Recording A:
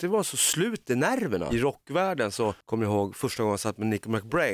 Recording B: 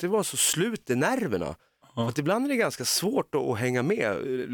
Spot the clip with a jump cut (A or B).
A